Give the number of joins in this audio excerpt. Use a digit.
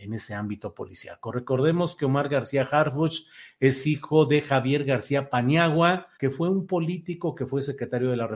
1